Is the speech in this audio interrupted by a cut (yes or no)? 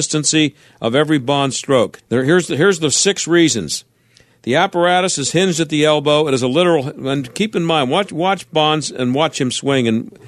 yes